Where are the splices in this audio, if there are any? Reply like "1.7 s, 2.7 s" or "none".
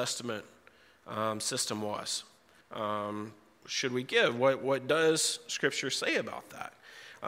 2.6 s